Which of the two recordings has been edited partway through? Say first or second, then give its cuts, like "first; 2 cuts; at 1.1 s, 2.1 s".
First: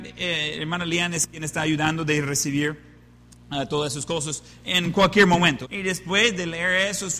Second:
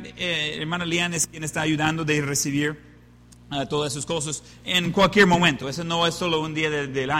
first; 1 cut; at 5.6 s